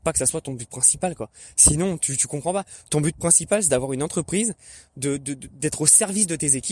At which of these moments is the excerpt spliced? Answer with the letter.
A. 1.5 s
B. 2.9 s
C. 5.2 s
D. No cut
D